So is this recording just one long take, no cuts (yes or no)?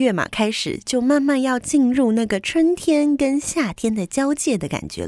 yes